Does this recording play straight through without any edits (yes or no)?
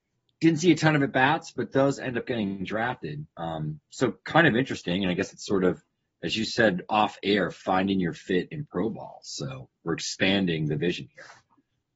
yes